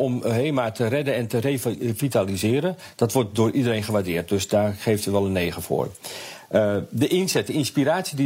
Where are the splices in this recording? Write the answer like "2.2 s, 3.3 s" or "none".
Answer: none